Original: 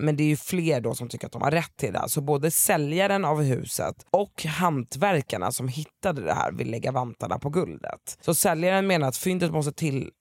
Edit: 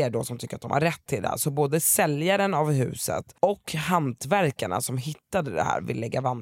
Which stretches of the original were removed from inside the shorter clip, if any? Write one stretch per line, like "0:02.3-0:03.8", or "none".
none